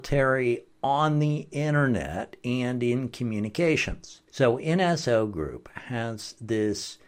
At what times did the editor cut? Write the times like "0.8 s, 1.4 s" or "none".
4.3 s